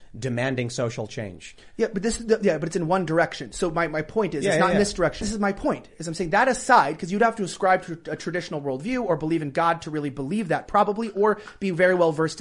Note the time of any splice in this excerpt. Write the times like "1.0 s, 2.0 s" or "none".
5.2 s